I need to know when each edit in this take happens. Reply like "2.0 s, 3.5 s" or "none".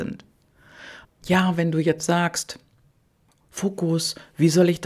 1.0 s